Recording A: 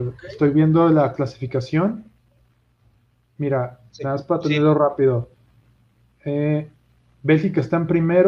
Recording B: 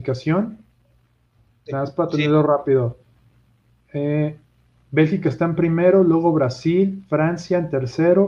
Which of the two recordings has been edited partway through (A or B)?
B